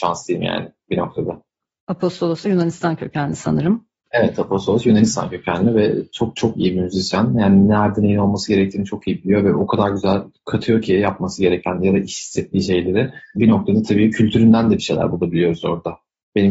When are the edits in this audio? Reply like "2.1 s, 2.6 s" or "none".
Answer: none